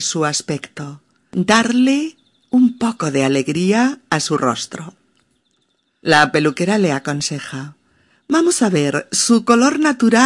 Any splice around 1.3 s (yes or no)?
yes